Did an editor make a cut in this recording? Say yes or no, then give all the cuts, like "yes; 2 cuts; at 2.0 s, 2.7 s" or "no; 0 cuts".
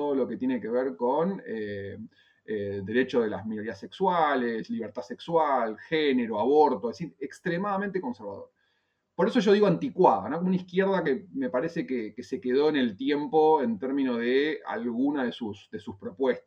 no; 0 cuts